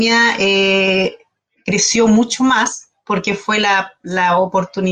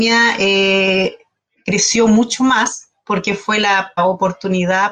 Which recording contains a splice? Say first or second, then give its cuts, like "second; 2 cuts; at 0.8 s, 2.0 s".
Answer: second; 1 cut; at 4.0 s